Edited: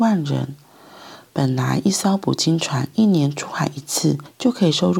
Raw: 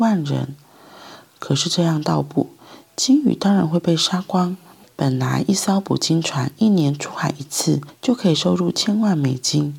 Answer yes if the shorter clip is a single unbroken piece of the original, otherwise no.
no